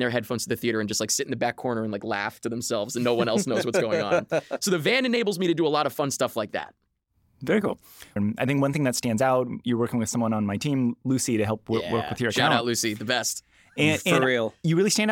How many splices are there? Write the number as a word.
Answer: one